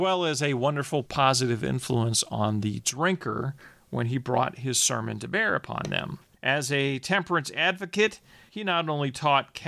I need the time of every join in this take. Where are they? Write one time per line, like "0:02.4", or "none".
0:01.0
0:06.3
0:08.5